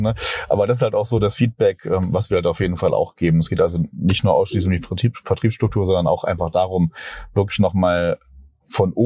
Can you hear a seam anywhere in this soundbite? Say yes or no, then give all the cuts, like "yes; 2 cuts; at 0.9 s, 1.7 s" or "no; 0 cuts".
no; 0 cuts